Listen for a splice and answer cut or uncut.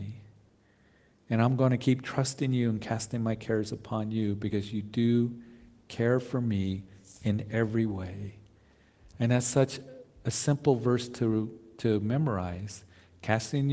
uncut